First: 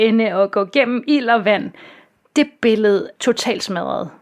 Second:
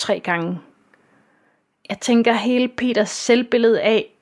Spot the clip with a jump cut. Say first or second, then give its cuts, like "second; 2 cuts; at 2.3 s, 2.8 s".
first; 1 cut; at 3.2 s